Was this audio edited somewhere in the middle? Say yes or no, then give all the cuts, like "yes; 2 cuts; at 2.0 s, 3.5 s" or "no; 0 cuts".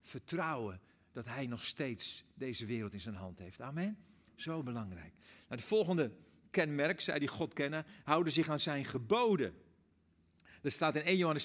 no; 0 cuts